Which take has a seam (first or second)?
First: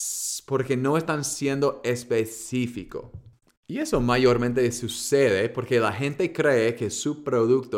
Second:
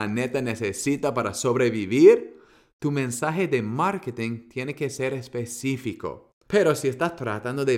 second